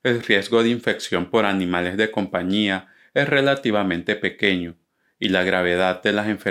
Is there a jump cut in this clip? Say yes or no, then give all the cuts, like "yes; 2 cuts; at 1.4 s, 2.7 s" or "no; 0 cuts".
no; 0 cuts